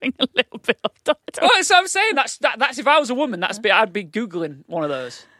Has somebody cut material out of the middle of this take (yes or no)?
no